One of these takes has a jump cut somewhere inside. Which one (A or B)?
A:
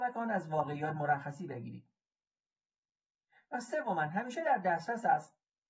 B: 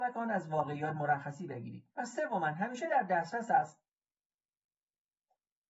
B